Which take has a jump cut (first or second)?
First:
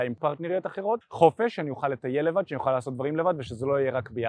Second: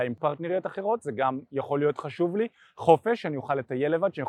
first